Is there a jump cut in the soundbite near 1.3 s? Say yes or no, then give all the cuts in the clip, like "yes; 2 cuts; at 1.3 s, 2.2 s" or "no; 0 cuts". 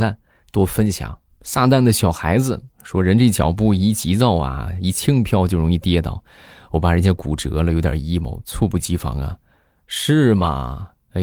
yes; 1 cut; at 1.3 s